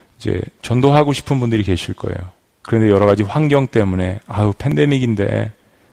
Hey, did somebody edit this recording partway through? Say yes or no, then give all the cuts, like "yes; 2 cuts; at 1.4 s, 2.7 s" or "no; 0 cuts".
no; 0 cuts